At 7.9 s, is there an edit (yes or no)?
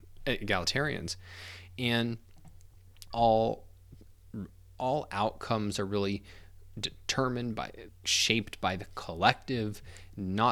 yes